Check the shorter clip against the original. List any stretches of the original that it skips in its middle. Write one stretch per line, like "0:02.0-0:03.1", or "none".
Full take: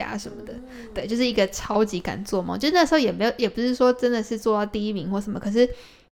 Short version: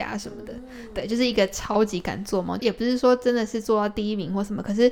0:02.6-0:03.4